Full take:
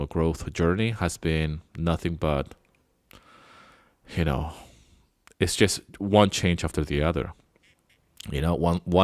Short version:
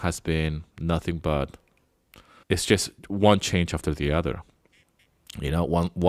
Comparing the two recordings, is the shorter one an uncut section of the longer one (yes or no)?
no